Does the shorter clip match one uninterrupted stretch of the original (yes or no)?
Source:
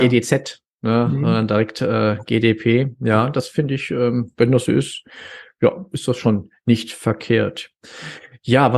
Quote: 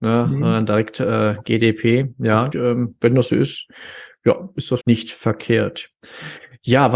no